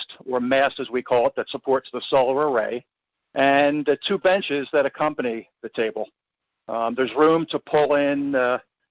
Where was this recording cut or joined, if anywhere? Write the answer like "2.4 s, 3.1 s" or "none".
3.2 s